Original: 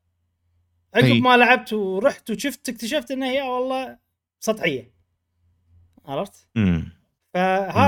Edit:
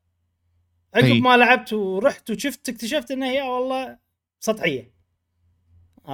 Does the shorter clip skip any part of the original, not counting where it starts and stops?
no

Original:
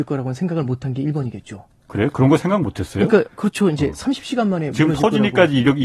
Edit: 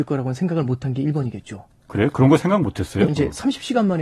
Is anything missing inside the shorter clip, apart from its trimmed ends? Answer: yes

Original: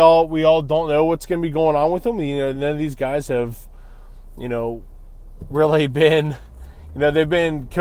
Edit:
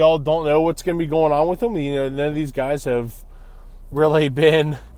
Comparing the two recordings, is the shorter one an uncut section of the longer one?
no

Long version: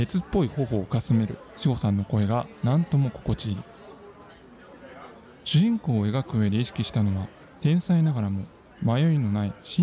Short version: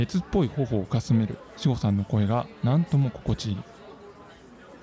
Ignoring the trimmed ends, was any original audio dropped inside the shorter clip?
no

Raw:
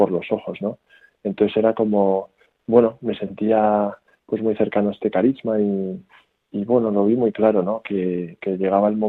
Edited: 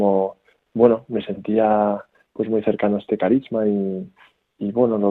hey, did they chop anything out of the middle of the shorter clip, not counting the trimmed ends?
no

